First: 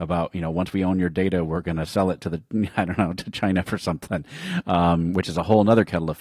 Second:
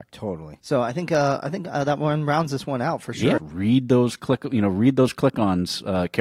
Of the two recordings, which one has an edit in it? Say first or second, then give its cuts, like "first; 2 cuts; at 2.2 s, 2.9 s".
second; 1 cut; at 3.4 s